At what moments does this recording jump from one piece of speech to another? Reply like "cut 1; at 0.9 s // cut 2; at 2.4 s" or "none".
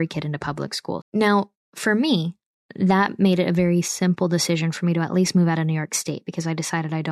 cut 1; at 1.0 s